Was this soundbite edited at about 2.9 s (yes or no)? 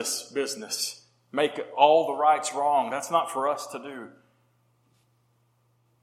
no